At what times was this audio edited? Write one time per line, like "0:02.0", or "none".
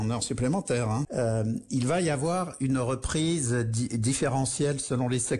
0:01.0